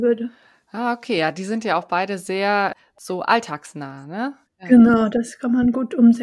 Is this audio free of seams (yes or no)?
no